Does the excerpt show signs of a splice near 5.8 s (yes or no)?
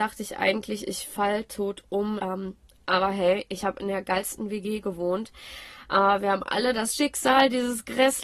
no